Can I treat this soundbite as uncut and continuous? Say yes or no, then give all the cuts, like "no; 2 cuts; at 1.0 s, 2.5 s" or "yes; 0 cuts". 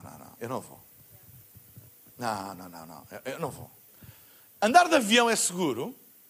yes; 0 cuts